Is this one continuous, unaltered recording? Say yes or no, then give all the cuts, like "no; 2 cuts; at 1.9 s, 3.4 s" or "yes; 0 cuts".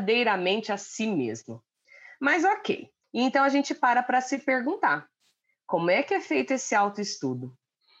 no; 1 cut; at 3.0 s